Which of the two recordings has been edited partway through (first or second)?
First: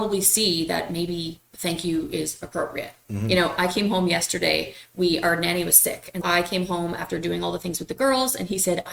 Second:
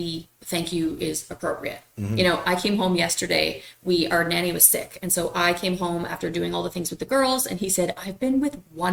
first